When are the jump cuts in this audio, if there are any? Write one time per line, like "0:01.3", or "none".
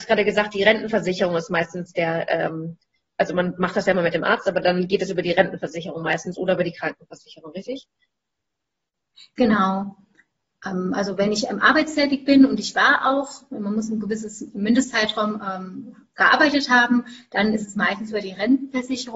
none